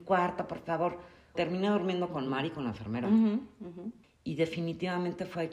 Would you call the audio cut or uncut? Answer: cut